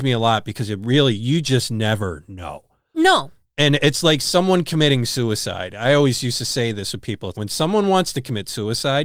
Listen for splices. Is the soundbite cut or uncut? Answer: cut